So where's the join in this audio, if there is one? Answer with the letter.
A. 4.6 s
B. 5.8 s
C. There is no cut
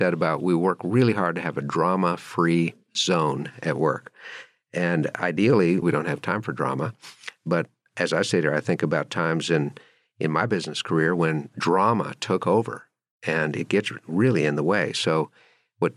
B